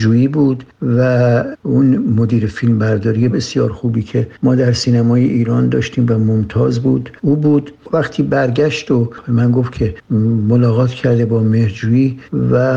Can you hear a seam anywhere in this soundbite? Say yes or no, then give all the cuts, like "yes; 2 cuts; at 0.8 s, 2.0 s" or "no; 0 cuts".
yes; 1 cut; at 3.3 s